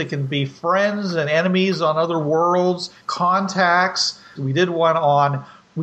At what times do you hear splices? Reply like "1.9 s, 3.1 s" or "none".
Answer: 4.4 s